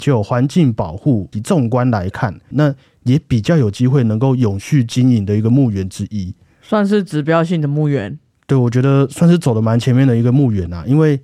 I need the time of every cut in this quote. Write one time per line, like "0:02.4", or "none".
0:01.3
0:02.5